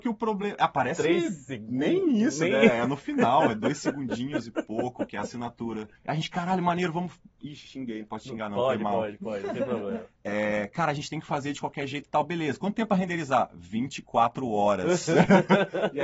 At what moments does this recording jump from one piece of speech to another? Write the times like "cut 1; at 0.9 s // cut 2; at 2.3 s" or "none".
cut 1; at 6.0 s